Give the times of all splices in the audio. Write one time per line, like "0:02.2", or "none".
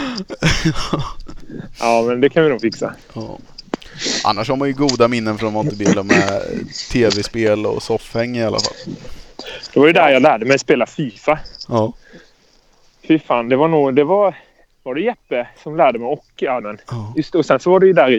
0:16.6